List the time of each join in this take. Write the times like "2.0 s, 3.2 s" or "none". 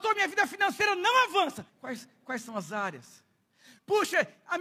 1.7 s